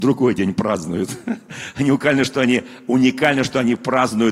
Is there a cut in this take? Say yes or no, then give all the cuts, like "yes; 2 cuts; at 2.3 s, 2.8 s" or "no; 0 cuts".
no; 0 cuts